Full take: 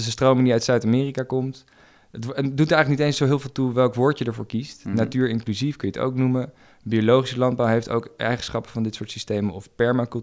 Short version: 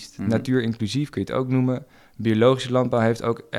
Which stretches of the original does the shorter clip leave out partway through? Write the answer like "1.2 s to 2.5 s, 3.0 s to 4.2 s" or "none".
none